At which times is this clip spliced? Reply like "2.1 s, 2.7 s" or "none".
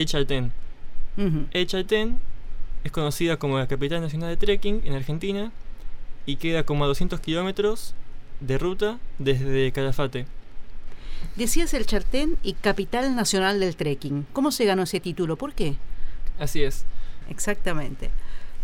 17.2 s